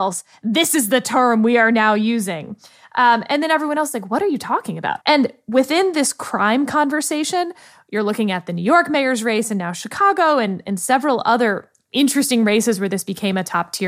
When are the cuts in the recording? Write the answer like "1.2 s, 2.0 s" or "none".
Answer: 5.0 s